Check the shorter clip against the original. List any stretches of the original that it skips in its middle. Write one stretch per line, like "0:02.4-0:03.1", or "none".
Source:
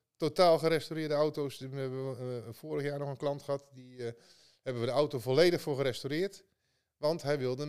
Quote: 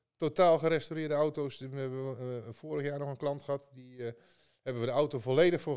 none